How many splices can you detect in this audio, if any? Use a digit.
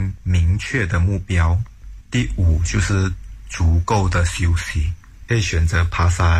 2